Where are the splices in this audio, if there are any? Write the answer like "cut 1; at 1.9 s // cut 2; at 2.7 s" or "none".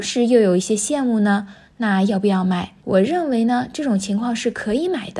cut 1; at 2.8 s